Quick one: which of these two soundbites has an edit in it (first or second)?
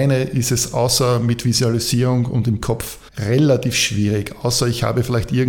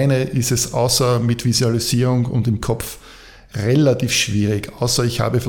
first